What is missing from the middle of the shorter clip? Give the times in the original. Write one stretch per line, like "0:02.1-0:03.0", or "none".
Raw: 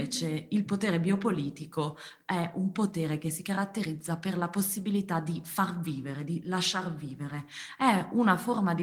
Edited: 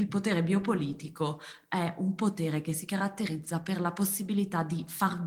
none